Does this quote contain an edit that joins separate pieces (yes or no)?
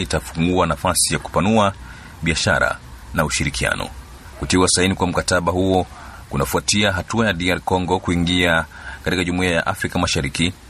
yes